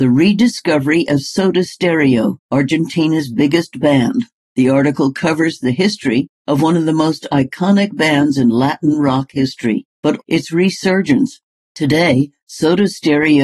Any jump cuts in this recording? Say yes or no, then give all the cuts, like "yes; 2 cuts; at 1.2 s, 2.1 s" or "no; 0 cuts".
yes; 1 cut; at 10.2 s